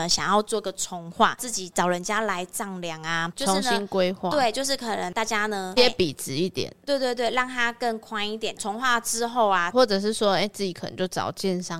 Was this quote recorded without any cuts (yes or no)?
no